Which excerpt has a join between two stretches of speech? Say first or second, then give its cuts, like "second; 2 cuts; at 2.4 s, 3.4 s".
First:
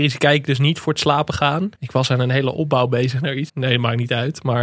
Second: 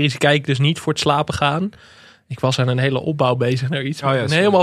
first; 2 cuts; at 1.7 s, 3.5 s